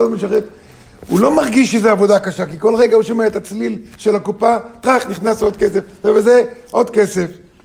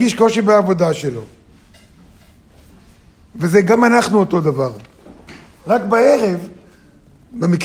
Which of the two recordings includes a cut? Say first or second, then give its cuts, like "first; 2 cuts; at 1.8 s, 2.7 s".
second; 1 cut; at 5.6 s